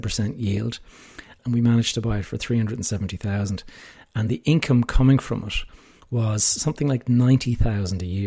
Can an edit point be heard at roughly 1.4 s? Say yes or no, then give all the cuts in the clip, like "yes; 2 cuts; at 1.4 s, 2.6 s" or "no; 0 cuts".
yes; 1 cut; at 1.4 s